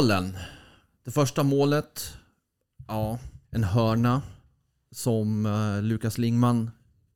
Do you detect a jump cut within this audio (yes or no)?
yes